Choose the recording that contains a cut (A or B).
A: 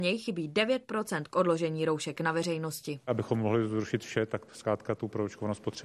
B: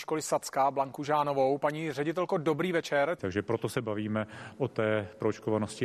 B